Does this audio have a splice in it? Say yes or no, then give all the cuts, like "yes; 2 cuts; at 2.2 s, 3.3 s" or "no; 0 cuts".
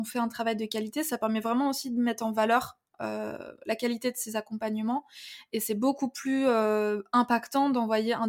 no; 0 cuts